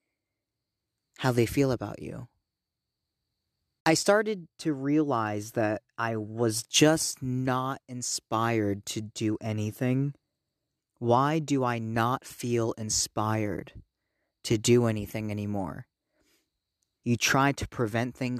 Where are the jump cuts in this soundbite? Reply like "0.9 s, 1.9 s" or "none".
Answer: 10.8 s, 17.0 s